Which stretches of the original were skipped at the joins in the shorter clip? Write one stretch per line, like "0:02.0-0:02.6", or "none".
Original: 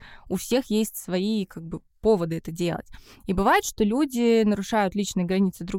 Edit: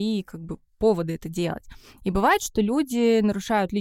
none